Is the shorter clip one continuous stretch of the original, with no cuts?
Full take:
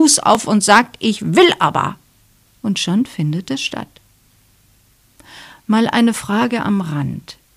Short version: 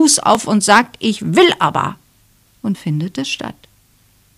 no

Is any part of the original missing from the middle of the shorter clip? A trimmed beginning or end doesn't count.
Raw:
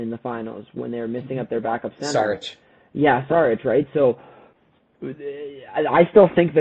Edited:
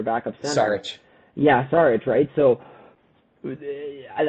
no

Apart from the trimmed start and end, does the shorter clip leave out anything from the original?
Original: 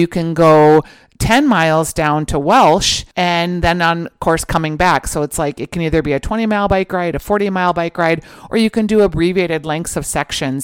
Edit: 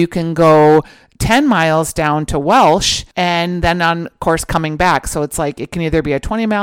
no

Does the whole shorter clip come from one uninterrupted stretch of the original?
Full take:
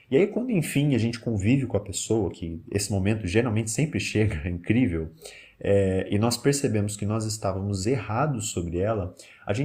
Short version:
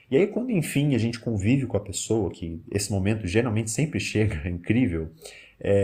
yes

